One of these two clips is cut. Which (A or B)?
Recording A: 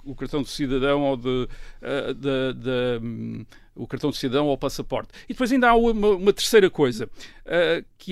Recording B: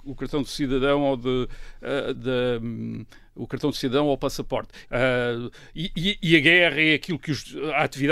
B